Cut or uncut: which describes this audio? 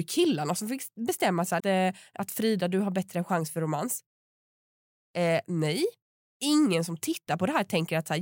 cut